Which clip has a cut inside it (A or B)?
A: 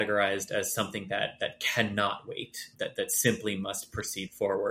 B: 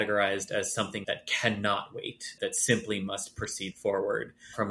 B